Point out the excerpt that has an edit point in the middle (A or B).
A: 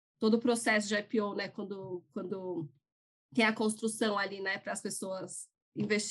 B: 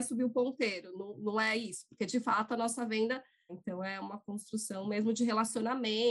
B